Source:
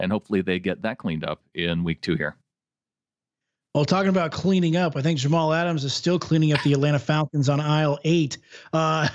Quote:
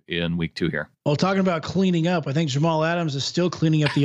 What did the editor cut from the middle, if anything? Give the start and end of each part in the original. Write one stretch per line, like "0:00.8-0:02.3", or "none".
0:02.4-0:03.7